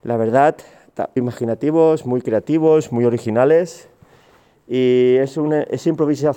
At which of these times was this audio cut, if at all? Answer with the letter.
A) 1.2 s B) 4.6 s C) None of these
A